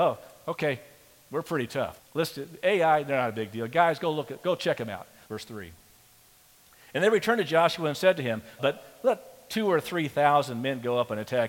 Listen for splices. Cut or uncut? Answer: cut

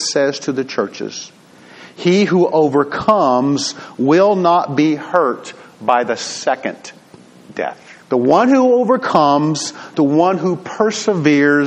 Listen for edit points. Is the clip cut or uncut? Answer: cut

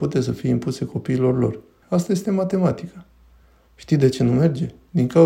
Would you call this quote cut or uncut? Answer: cut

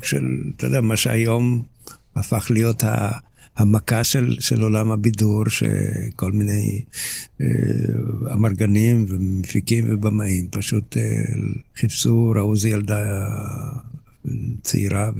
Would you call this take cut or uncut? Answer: uncut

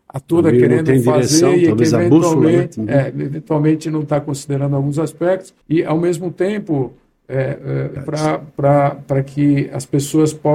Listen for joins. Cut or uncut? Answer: cut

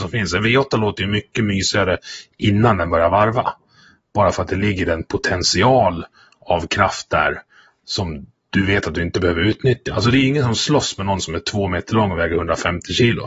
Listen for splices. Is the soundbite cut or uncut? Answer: uncut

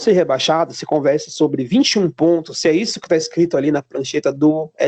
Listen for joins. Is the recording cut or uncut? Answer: uncut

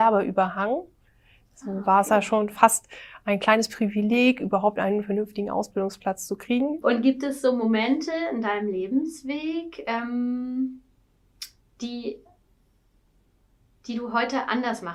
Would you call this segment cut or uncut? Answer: cut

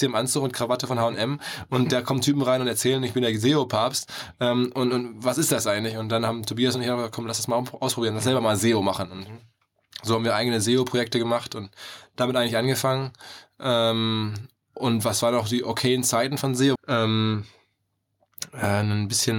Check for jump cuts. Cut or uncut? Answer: cut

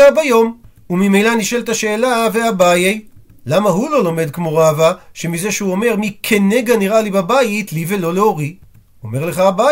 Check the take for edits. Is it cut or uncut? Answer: uncut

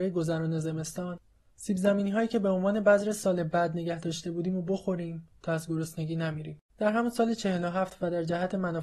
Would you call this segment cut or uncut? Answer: cut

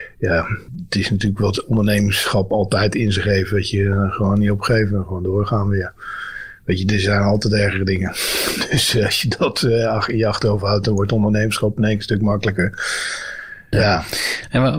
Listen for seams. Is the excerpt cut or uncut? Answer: cut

